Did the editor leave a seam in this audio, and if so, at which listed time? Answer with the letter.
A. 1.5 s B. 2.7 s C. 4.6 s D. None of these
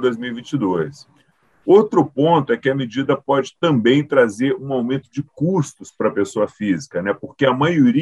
D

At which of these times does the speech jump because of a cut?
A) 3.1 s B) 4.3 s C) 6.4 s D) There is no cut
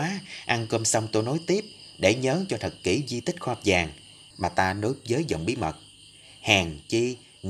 B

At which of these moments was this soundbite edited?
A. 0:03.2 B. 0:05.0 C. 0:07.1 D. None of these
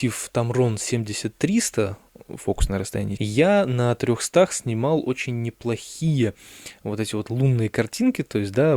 A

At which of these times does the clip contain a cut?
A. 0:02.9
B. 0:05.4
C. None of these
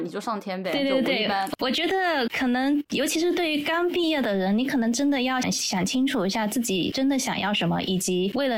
B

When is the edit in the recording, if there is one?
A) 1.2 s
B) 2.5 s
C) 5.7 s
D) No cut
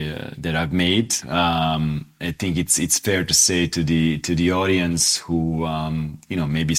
A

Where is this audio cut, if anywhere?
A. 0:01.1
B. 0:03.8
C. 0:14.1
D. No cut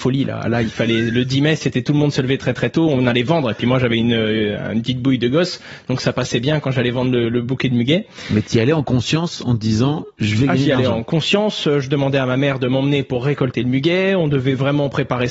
A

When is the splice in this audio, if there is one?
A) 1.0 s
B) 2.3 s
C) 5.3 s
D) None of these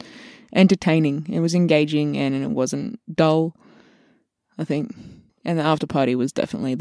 C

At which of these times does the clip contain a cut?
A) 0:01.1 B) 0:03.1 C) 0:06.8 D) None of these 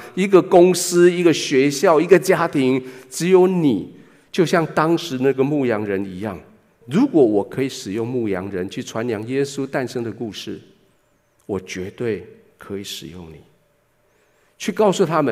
C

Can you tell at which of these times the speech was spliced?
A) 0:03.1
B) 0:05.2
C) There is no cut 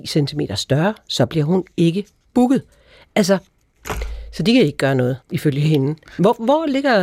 B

